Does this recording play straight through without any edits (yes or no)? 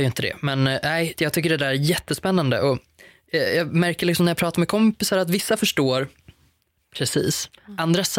no